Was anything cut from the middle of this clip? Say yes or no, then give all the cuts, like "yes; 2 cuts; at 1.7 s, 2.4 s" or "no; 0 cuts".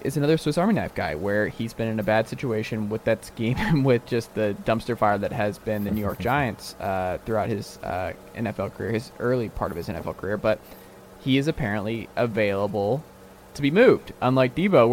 no; 0 cuts